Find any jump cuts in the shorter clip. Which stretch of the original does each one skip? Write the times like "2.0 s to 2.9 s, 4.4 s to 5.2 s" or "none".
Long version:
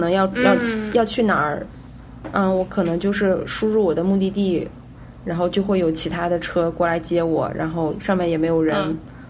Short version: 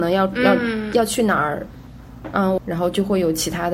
2.6 s to 5.2 s